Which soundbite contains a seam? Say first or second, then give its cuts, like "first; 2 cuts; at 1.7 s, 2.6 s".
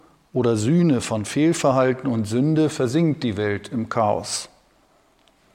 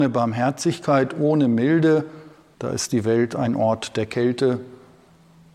second; 1 cut; at 2.5 s